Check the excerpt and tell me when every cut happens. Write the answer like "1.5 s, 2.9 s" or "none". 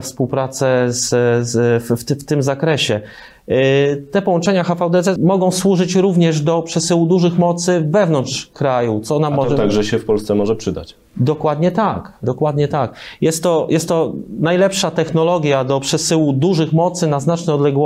5.2 s, 12.2 s